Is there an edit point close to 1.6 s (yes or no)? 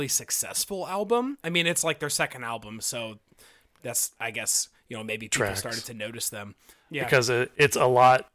no